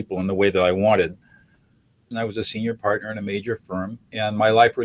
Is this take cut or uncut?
cut